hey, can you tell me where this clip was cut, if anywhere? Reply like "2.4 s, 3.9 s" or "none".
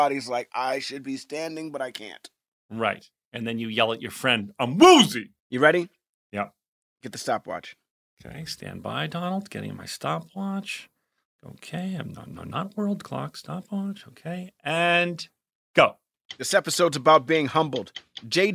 5.4 s